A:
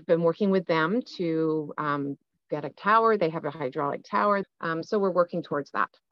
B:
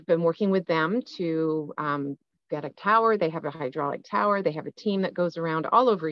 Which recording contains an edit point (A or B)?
A